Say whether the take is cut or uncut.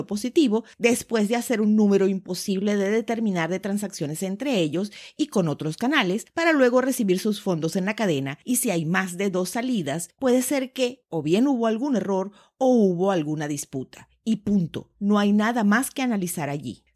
uncut